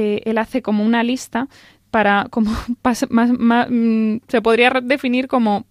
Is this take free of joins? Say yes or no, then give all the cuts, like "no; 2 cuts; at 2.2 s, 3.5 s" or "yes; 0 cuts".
yes; 0 cuts